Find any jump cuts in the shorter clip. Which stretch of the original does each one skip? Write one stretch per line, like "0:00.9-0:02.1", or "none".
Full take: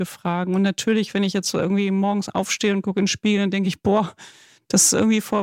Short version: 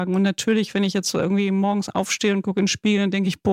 none